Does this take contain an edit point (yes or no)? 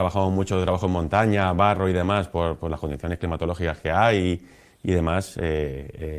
no